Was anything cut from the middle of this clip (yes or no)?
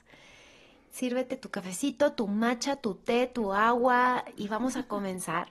yes